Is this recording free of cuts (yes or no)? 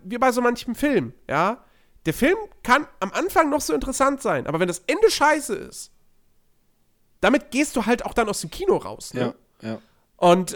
yes